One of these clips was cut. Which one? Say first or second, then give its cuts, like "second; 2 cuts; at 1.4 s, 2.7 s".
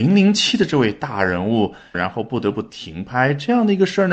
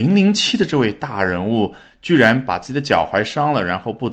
first; 1 cut; at 1.9 s